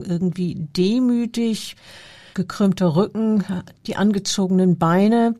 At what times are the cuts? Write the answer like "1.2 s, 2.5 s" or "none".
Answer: 2.3 s